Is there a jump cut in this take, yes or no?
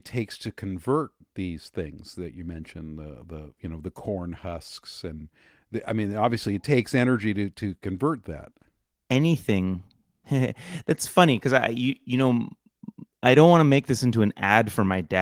no